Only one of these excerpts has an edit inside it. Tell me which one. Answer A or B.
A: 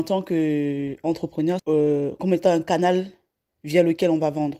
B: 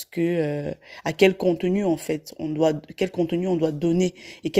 A